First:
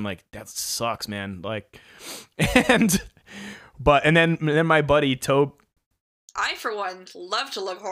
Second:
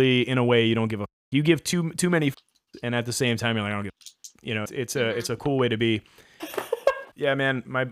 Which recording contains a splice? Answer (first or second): second